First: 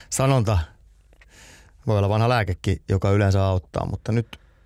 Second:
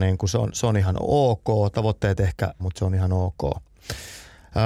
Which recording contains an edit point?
second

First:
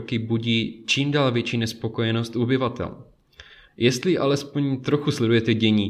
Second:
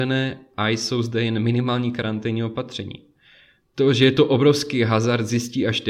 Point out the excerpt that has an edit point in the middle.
first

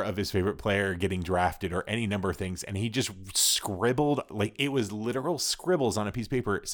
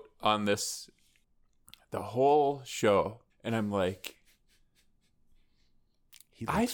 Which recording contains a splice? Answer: second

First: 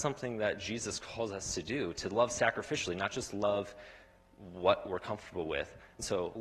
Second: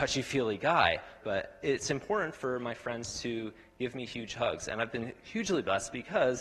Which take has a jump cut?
second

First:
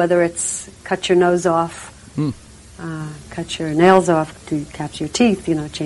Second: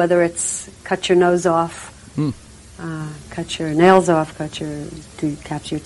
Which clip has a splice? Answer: first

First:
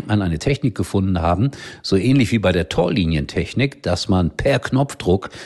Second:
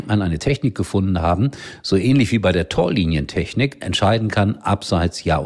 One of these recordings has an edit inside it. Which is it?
second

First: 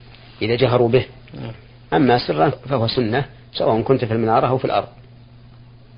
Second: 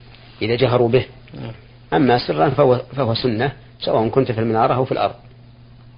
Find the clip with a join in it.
first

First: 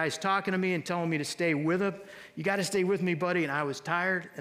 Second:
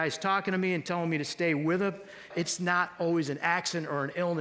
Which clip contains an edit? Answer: second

